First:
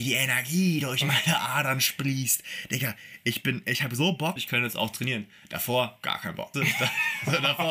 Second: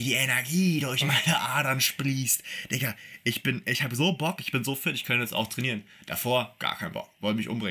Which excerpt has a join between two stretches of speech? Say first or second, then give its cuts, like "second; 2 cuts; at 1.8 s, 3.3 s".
first; 2 cuts; at 4.4 s, 6.5 s